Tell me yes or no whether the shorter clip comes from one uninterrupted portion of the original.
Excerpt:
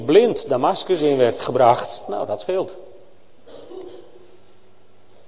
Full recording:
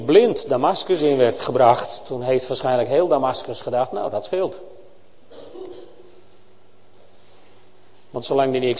no